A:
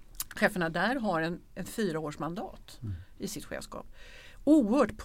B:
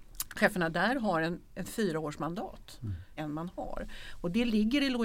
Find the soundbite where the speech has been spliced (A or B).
B